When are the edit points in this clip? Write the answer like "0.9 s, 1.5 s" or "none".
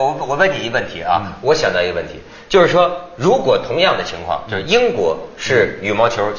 none